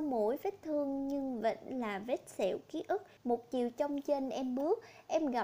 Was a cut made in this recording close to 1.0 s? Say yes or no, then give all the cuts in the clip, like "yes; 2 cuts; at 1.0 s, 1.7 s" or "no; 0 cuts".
no; 1 cut; at 3.2 s